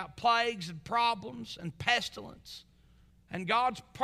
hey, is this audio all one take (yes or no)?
no